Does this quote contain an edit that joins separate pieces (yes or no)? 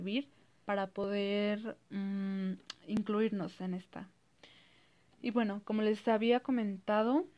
no